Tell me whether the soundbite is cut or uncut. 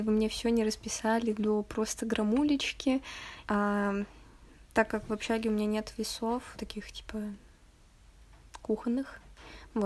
cut